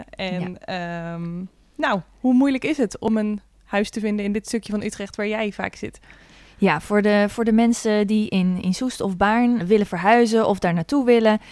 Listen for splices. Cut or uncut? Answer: cut